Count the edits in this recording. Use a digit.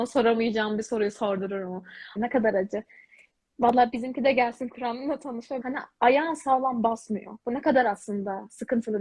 2